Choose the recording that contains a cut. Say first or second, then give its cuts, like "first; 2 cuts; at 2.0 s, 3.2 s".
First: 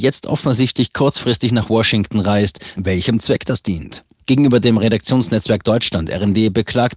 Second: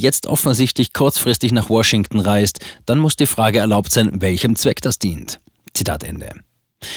first; 2 cuts; at 2.8 s, 4.2 s